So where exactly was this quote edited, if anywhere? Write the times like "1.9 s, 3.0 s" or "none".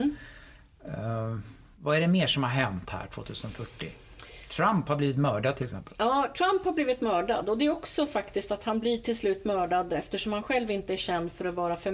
none